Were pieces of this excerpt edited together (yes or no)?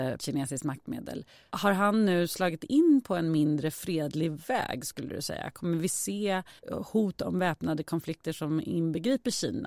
yes